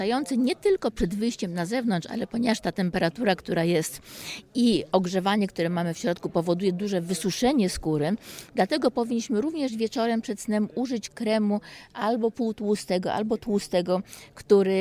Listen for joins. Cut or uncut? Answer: uncut